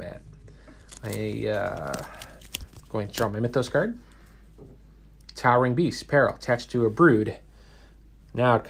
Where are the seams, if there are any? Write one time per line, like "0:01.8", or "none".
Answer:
none

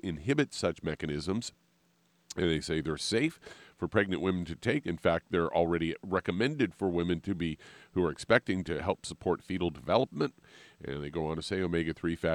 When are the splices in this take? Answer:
none

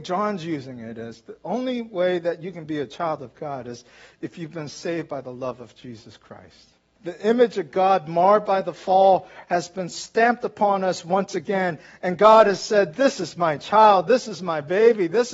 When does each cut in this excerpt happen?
0:07.0

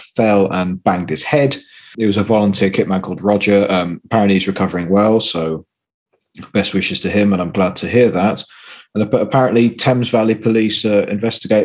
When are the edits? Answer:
none

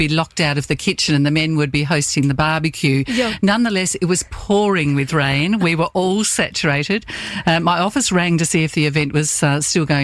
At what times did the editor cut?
none

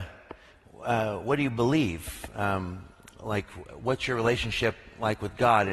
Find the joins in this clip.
none

